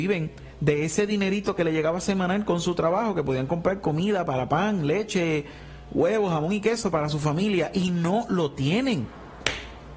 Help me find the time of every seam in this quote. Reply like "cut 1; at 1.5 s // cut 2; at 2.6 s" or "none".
none

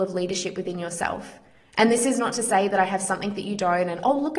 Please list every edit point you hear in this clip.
none

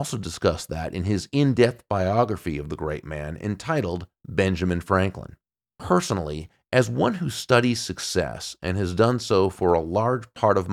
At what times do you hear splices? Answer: none

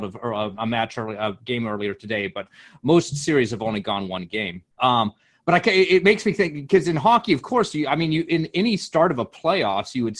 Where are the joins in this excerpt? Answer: cut 1; at 4.7 s

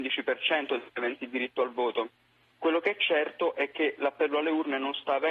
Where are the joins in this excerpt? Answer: cut 1; at 2.5 s

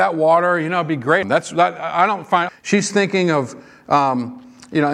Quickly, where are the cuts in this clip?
cut 1; at 1.2 s // cut 2; at 2.5 s

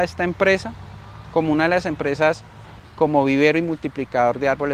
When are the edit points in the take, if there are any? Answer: cut 1; at 2.8 s

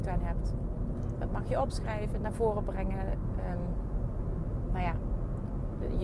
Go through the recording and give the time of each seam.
cut 1; at 1.2 s // cut 2; at 2.2 s

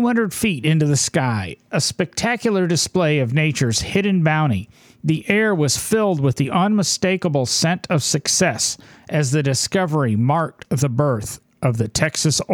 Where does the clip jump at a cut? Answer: none

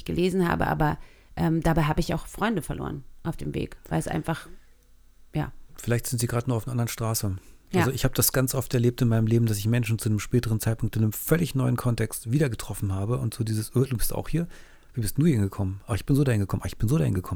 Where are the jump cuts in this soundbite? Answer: none

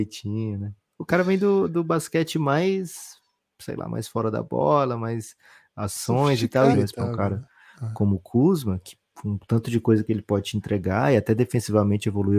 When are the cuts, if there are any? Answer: cut 1; at 6.7 s

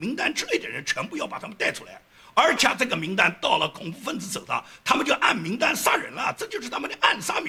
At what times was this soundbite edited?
cut 1; at 2.6 s

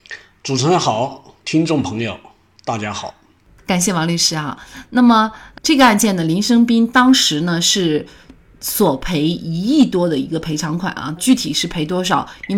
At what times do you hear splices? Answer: cut 1; at 3.6 s // cut 2; at 11.2 s

